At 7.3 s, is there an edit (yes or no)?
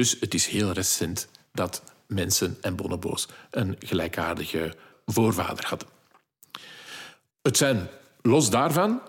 yes